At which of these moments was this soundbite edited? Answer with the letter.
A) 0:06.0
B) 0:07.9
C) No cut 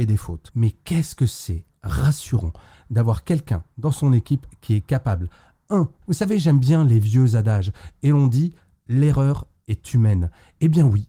A